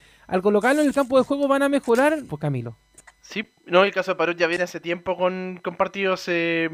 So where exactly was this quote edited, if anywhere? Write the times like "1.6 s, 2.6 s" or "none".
2.3 s

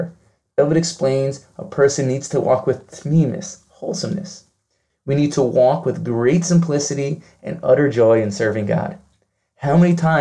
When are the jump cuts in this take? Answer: 4.9 s

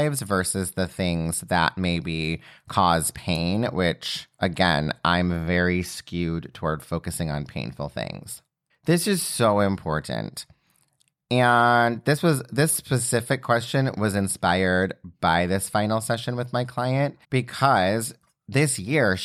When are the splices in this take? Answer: 8.7 s, 17.2 s

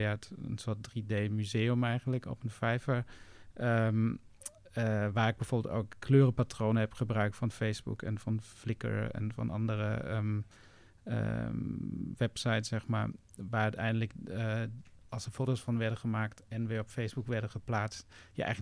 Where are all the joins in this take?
none

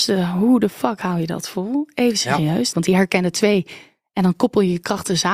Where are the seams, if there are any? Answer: 2.7 s

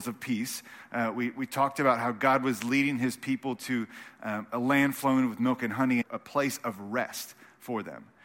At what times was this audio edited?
6.0 s

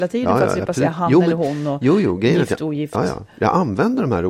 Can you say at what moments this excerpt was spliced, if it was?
none

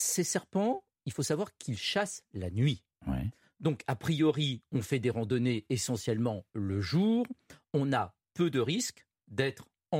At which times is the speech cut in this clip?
none

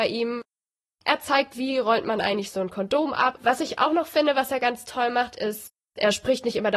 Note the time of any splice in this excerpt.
3.3 s

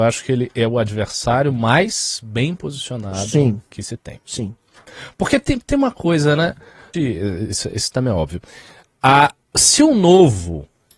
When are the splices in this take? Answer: 6.9 s

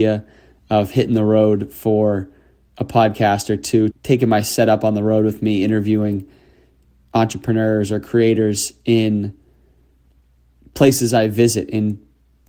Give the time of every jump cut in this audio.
3.9 s

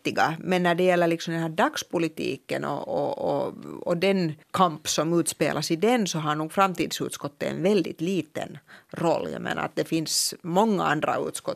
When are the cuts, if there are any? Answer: 4.4 s

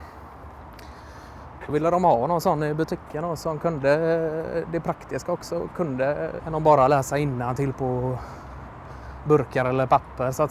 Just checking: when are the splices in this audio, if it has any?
6.4 s

